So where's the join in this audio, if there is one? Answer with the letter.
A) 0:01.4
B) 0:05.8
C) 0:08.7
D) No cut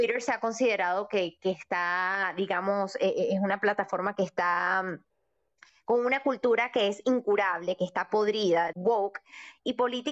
C